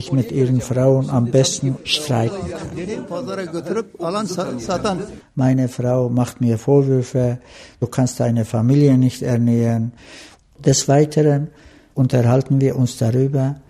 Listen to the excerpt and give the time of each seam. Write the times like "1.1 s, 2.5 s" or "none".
5.2 s